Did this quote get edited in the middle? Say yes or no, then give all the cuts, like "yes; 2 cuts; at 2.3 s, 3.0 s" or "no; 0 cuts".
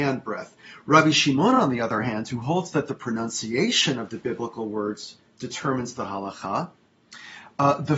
no; 0 cuts